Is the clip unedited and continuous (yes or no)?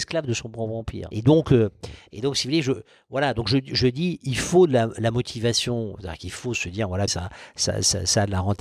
no